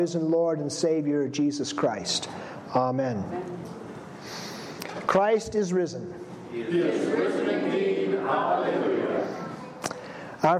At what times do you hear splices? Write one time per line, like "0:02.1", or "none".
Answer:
none